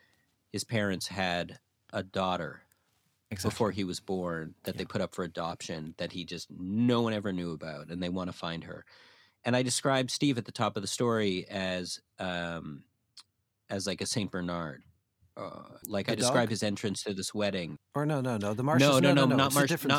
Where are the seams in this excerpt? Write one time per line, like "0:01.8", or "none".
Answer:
0:15.8
0:17.8